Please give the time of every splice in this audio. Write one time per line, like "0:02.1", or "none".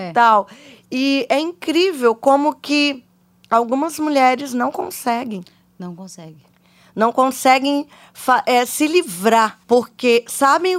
0:09.6